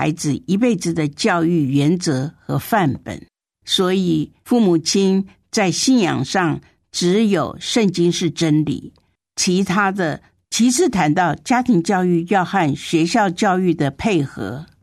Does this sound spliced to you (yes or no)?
yes